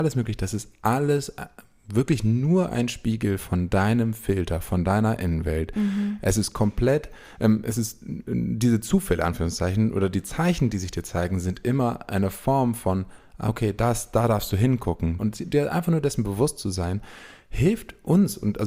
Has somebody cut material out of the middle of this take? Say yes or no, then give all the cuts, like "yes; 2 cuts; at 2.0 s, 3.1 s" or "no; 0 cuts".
yes; 1 cut; at 15.2 s